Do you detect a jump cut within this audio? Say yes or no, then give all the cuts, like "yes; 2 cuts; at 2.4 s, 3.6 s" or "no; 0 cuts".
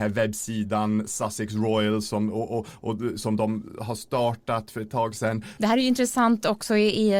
yes; 1 cut; at 5.6 s